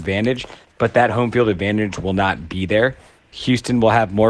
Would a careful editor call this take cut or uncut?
uncut